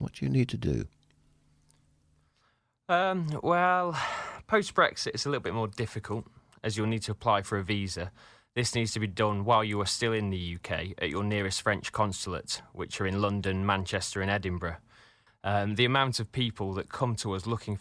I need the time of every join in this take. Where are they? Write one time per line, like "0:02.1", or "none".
0:15.3